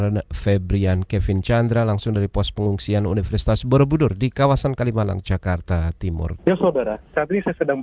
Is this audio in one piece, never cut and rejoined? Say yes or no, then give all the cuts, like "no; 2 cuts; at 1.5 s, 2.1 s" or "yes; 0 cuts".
no; 1 cut; at 6.4 s